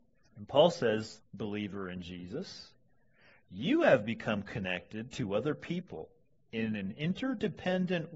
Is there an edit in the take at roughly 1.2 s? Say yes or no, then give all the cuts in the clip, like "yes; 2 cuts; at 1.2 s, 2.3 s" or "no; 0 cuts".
yes; 1 cut; at 1.2 s